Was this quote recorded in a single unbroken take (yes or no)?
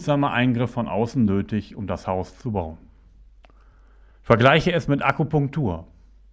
yes